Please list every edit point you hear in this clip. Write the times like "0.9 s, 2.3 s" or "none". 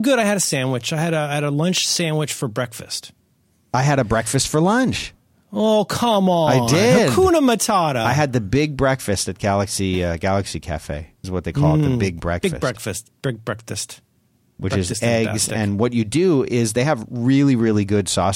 11.2 s